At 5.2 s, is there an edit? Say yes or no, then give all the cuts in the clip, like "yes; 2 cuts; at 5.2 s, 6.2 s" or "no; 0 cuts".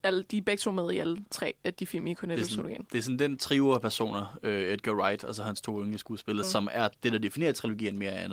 no; 2 cuts; at 1.7 s, 6.4 s